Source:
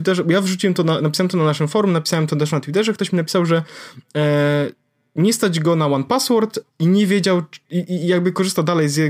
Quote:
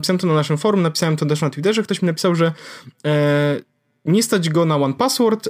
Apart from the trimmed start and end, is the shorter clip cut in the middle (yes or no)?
no